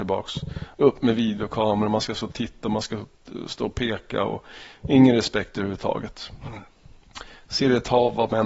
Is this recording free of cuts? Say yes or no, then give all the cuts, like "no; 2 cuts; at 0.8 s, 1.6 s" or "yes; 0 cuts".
yes; 0 cuts